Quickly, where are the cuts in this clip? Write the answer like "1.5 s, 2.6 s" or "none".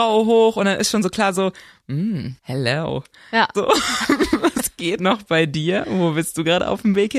2.4 s, 3.5 s, 5.0 s